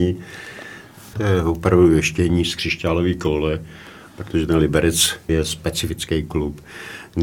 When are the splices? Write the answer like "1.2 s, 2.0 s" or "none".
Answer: 1.1 s, 5.3 s